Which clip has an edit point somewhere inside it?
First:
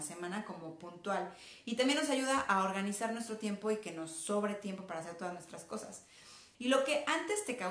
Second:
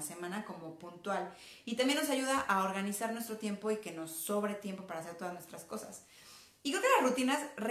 first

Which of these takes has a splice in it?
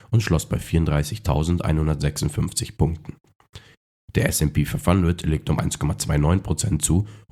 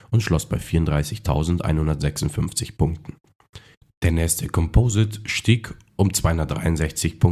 second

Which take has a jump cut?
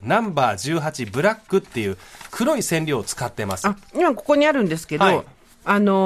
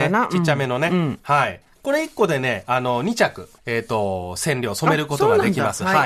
second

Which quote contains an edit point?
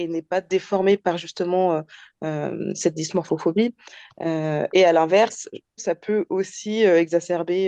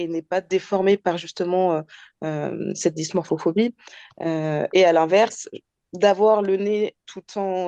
first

